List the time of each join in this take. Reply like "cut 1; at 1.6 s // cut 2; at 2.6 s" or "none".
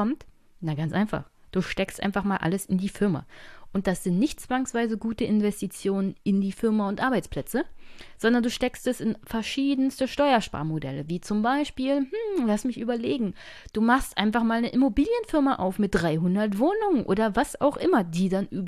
none